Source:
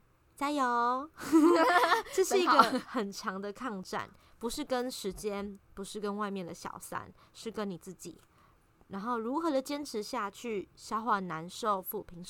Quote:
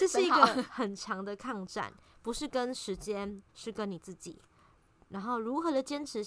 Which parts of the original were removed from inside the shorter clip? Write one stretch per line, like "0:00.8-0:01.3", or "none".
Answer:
0:05.7-0:07.3

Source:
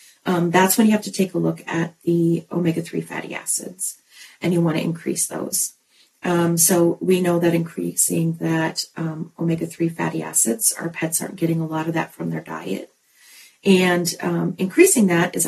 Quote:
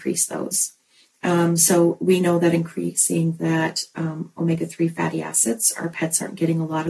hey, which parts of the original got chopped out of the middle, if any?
none

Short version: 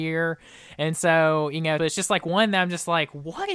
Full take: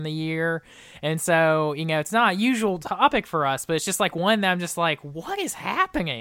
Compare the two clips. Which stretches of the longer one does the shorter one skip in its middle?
0:02.0-0:03.7

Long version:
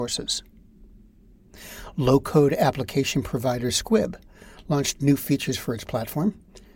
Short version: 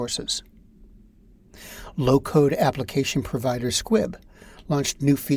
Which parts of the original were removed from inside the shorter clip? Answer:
none

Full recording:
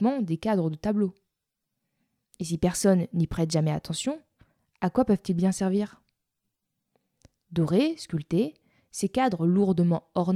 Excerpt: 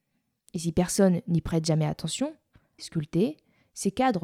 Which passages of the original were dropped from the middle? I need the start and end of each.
0:04.6-0:08.0

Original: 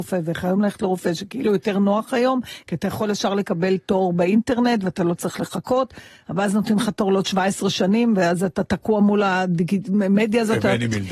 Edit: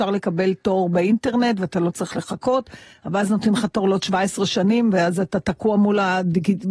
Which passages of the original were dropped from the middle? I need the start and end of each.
none

